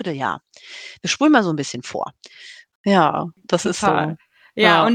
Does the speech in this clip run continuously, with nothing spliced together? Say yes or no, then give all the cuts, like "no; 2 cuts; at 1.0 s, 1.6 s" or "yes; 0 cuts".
no; 1 cut; at 2.7 s